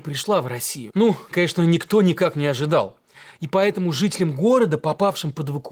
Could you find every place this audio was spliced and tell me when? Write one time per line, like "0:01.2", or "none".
0:01.3